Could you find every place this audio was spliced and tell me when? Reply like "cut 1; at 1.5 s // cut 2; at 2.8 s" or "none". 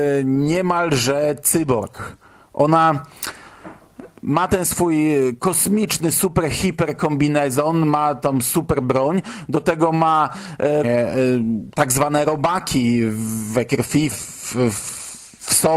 cut 1; at 10.8 s // cut 2; at 14.1 s